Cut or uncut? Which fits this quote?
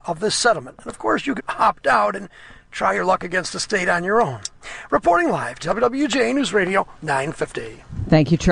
cut